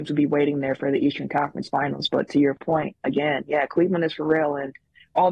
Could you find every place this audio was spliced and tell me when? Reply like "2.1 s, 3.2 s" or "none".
none